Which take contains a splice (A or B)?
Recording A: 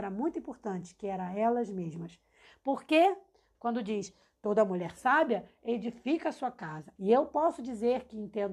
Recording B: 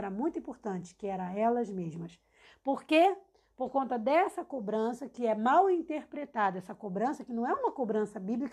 A